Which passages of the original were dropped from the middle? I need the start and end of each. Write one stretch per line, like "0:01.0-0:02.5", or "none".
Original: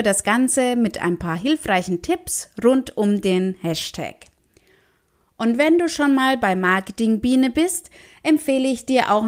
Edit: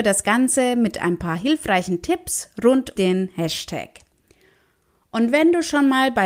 0:03.0-0:03.2